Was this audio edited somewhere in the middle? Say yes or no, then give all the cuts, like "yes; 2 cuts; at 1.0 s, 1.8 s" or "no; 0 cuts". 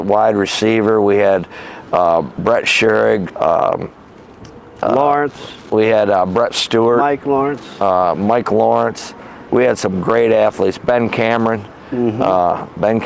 yes; 1 cut; at 3.3 s